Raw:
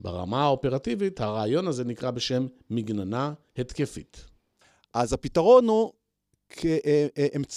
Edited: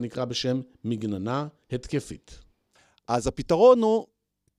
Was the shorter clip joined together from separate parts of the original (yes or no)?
no